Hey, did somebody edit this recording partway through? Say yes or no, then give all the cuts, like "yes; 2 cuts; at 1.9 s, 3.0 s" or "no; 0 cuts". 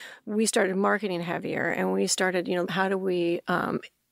yes; 1 cut; at 2.6 s